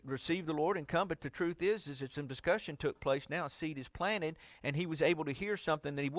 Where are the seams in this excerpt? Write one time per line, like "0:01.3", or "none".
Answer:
none